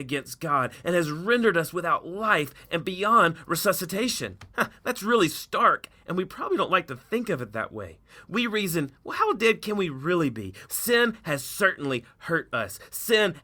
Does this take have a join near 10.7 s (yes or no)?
yes